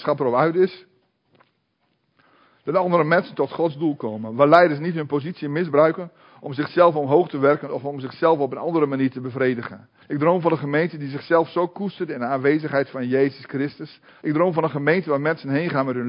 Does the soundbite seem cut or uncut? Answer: cut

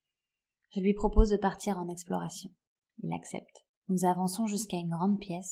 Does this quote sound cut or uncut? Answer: cut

